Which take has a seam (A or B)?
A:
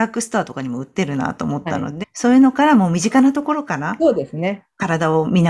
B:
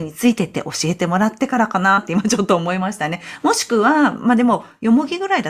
A